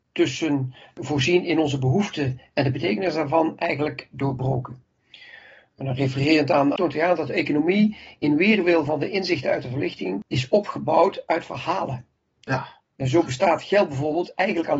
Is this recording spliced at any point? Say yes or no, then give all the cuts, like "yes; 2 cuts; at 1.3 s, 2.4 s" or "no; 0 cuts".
yes; 1 cut; at 6.8 s